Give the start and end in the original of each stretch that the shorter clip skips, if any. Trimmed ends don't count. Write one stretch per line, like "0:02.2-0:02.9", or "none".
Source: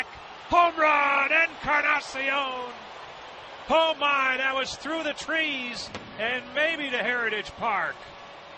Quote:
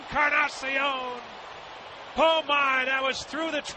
none